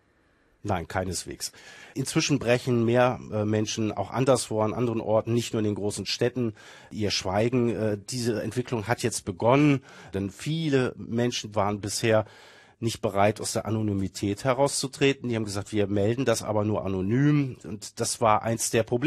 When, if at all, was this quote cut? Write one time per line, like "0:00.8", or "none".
0:10.1
0:11.5